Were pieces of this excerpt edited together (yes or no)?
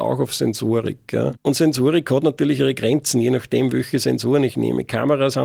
yes